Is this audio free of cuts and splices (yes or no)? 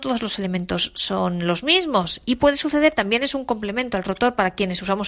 yes